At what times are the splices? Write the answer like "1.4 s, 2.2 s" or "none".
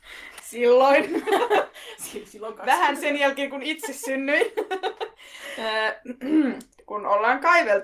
none